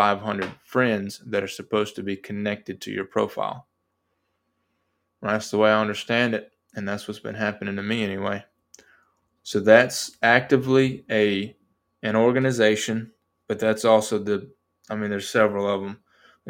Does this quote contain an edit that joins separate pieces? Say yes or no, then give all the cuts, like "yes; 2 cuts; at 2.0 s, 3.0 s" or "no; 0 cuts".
yes; 1 cut; at 9.4 s